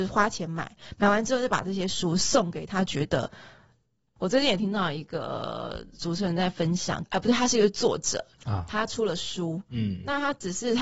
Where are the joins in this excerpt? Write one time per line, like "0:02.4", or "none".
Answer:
0:04.2
0:07.0